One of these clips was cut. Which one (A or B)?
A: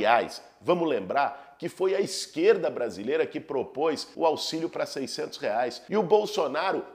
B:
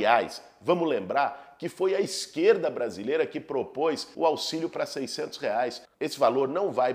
B